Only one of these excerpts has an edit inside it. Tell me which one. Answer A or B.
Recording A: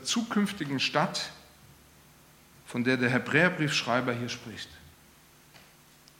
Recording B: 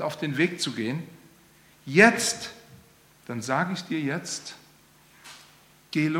B